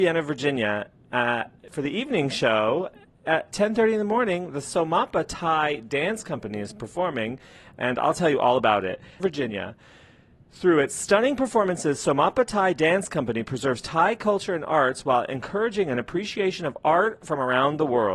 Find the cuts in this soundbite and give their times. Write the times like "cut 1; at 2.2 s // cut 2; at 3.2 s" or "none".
cut 1; at 9.2 s